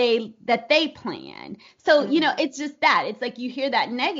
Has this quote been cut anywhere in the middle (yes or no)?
no